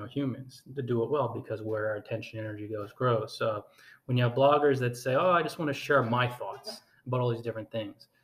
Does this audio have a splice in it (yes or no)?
no